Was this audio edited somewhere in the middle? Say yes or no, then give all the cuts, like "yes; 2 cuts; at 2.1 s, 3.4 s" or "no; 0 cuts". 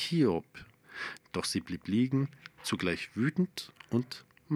yes; 1 cut; at 1.2 s